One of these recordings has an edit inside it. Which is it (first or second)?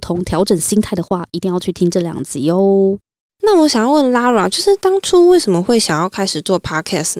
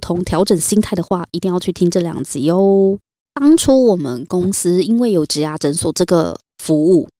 second